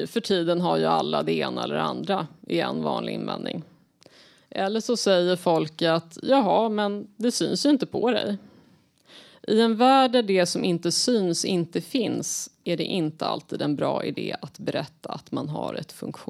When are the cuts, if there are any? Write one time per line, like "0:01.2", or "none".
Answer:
none